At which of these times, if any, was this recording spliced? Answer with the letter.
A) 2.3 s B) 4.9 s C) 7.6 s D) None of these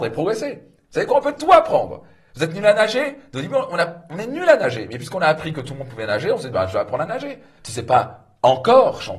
C